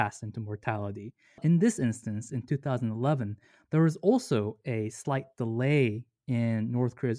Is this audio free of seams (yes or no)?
yes